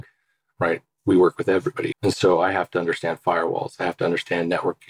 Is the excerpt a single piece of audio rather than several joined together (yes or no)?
no